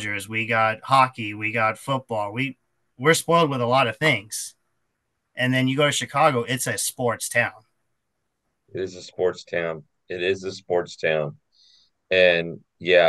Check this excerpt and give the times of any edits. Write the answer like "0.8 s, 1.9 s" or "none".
none